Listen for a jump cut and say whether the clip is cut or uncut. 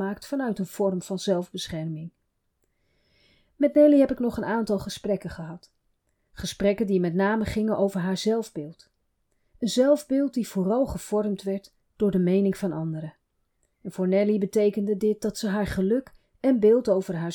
uncut